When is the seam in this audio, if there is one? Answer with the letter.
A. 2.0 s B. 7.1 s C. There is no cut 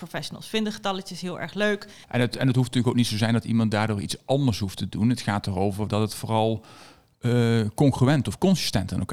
A